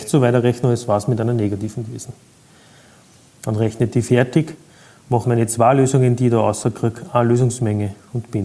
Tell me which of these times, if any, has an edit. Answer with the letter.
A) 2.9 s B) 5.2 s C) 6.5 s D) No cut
B